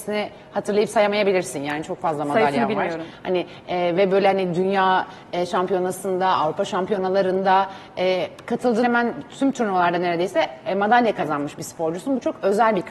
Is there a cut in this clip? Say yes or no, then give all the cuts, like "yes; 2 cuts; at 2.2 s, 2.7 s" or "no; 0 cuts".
yes; 1 cut; at 8.8 s